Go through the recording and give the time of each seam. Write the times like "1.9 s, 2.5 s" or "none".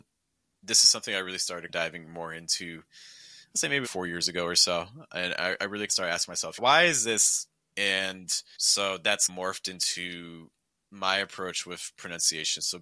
3.8 s